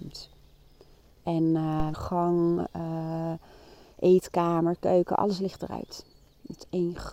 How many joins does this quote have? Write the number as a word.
one